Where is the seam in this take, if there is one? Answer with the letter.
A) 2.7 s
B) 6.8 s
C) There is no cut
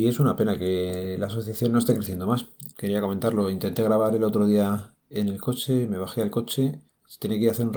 A